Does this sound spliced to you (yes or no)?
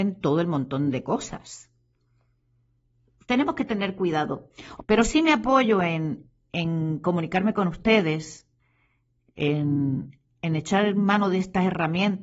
yes